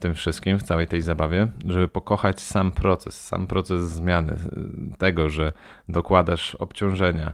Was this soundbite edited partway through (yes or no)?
no